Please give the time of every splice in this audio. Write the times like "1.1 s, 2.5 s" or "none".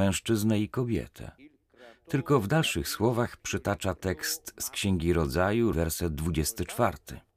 5.7 s